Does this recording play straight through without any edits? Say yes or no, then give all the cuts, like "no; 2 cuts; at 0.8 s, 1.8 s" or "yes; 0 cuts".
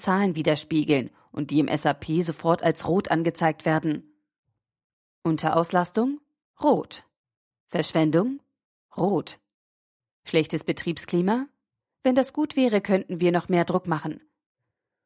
yes; 0 cuts